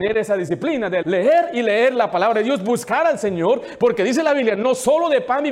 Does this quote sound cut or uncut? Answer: cut